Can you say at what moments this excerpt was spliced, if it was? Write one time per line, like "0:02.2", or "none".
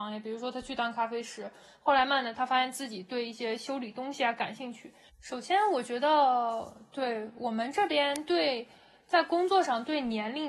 0:02.1
0:05.1